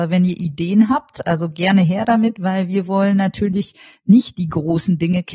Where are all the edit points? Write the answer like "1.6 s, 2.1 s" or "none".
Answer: none